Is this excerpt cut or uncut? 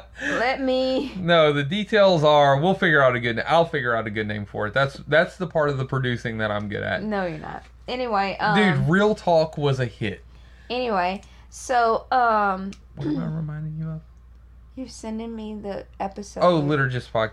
uncut